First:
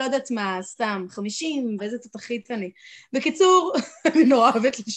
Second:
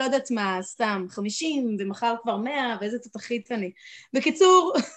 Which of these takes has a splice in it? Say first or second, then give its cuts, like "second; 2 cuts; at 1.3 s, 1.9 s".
first; 1 cut; at 1.8 s